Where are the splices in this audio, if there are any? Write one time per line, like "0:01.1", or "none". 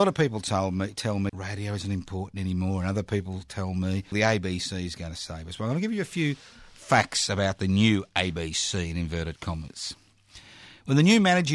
0:01.3
0:04.1